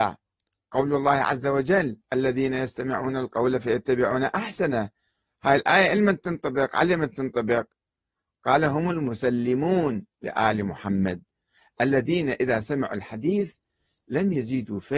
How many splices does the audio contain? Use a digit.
1